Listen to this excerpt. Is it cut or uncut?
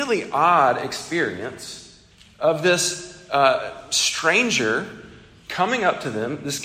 uncut